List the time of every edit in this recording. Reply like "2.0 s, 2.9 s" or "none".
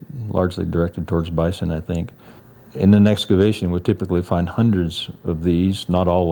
none